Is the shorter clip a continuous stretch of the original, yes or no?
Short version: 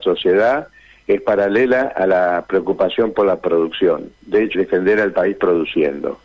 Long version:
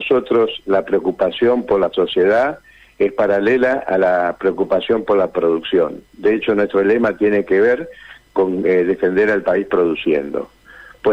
no